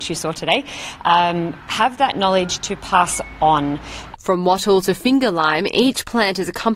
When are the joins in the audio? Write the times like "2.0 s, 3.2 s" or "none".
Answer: 4.1 s